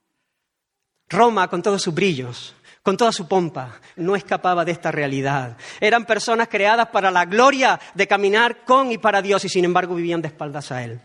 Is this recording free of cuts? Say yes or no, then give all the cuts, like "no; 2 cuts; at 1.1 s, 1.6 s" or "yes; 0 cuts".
no; 1 cut; at 4.0 s